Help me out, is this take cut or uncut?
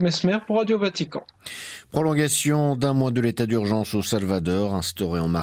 uncut